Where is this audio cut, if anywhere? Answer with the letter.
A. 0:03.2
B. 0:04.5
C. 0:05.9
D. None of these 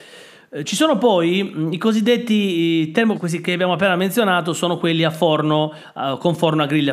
A